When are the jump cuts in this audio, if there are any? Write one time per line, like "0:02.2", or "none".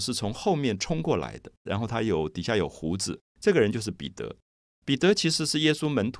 0:01.7